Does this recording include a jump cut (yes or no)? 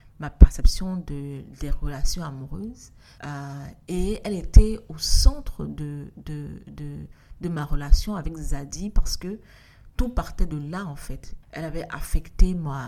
yes